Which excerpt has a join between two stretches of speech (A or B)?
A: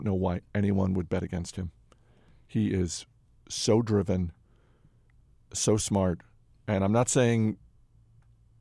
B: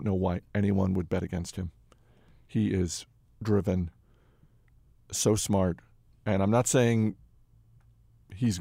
B